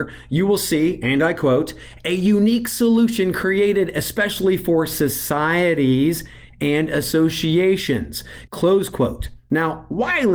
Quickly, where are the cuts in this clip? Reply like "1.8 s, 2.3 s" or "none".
8.5 s

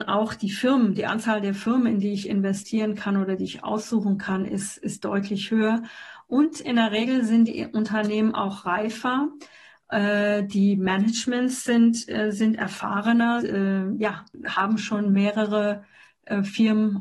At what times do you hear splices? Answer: 13.4 s

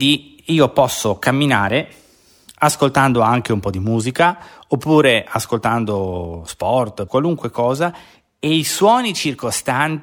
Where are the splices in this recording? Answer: 7.1 s

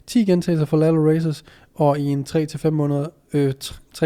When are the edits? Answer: none

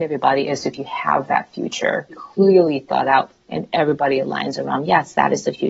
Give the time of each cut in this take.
2.1 s

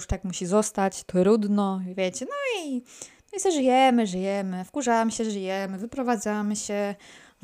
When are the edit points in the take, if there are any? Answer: none

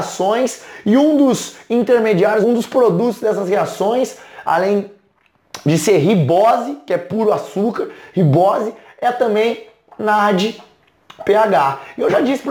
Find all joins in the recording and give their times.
2.4 s

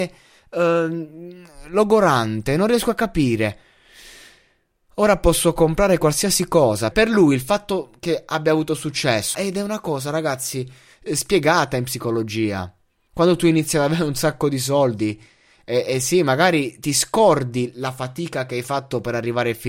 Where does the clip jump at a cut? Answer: 6.9 s, 9.3 s

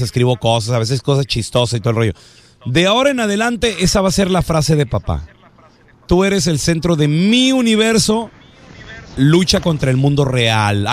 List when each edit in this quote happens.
none

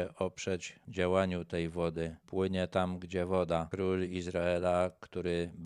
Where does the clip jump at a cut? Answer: none

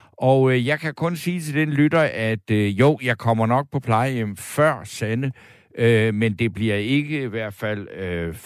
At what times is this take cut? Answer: none

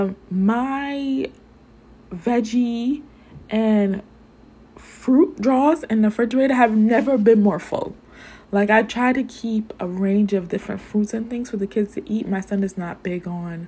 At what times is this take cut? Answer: none

